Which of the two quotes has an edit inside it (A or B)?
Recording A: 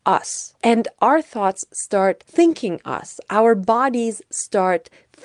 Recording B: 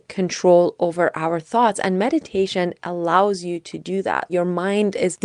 B